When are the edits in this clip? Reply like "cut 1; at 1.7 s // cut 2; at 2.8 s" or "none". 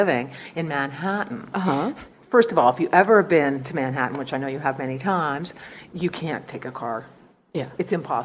none